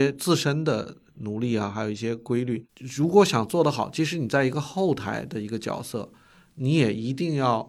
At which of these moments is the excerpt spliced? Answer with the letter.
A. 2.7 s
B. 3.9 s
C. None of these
A